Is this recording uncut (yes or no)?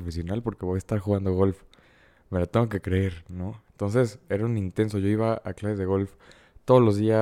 yes